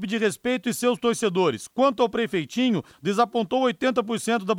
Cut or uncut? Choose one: uncut